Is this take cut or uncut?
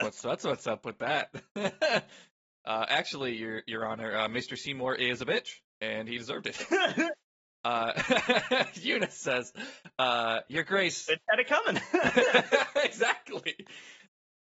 uncut